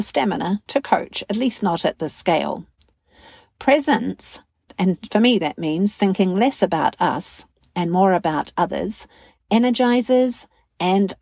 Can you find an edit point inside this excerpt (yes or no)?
no